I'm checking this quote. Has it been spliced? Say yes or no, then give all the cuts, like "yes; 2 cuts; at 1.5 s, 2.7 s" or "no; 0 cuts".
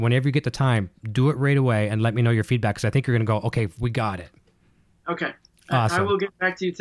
no; 0 cuts